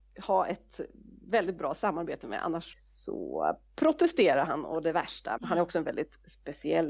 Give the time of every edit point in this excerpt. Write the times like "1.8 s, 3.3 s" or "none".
2.7 s, 5.4 s